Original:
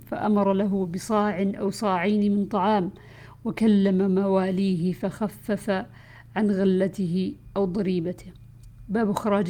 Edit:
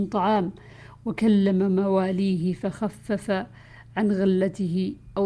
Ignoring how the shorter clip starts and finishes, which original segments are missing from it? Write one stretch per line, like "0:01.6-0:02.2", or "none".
none